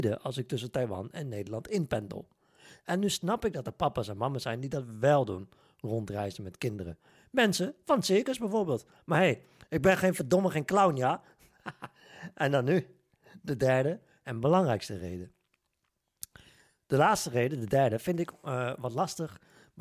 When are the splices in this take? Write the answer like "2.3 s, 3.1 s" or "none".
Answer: none